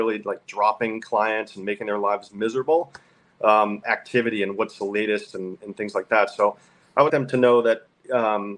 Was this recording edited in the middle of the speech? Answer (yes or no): yes